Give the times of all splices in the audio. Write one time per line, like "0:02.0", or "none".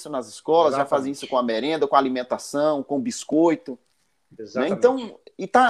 none

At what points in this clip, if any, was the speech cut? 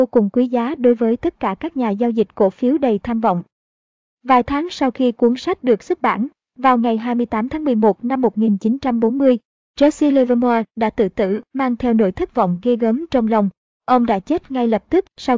none

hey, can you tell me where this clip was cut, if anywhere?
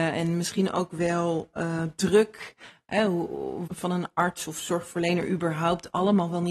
0:03.7

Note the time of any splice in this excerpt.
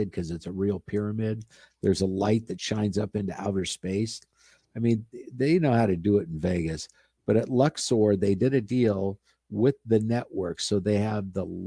none

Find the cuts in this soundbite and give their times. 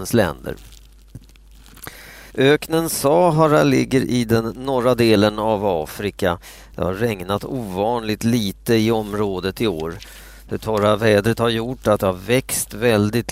0:02.3

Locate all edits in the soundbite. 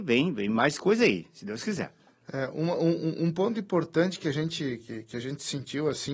0:04.8

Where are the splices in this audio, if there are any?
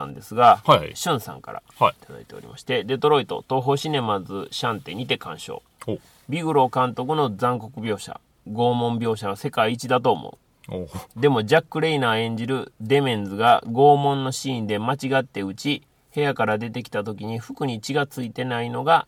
0:00.9

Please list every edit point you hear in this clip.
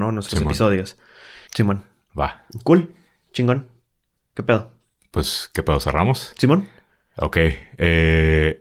0:01.5

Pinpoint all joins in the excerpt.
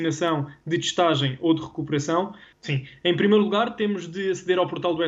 0:02.5

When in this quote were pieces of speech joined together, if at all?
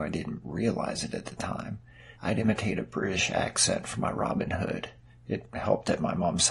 0:02.2

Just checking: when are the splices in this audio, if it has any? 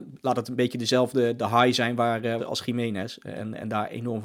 0:02.4

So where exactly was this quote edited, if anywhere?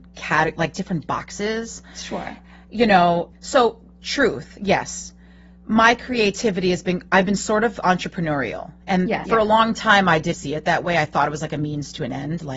0:03.3
0:09.2
0:10.3

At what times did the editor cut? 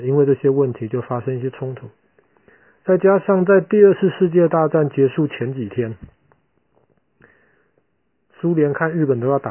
none

